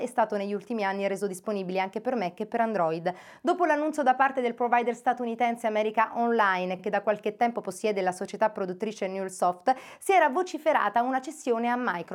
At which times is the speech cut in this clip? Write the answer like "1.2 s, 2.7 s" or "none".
none